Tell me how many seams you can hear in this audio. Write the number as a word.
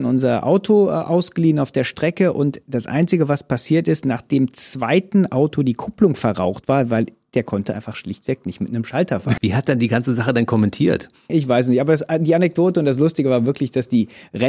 two